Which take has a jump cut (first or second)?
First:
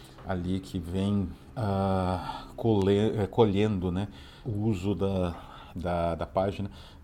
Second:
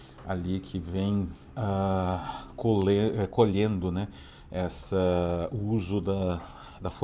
first